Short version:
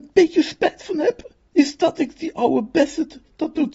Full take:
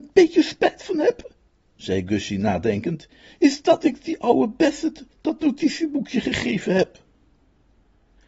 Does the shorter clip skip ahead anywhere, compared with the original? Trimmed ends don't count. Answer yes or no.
yes